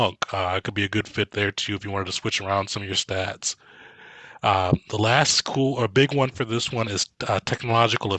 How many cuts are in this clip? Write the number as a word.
zero